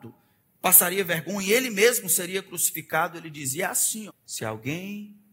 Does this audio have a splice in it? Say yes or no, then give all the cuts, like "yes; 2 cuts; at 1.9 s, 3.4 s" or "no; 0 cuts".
yes; 1 cut; at 4.1 s